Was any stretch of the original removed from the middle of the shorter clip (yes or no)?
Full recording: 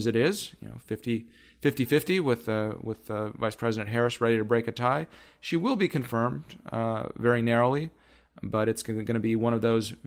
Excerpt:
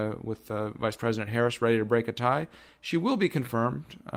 no